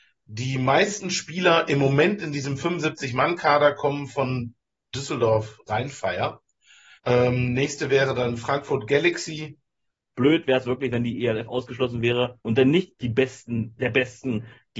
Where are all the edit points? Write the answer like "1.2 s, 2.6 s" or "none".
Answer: 7.0 s, 10.1 s, 12.4 s